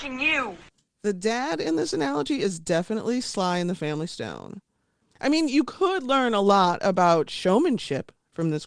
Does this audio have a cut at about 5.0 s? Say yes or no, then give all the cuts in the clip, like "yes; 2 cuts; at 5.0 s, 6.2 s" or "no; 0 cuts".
yes; 1 cut; at 5.0 s